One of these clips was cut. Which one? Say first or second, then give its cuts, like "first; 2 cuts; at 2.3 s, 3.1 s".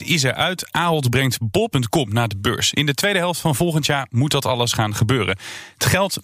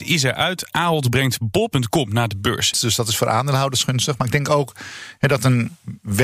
second; 1 cut; at 2.7 s